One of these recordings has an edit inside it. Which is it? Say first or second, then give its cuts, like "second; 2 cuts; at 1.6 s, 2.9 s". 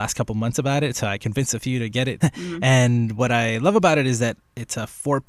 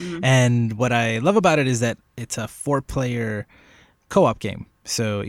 first; 1 cut; at 2.2 s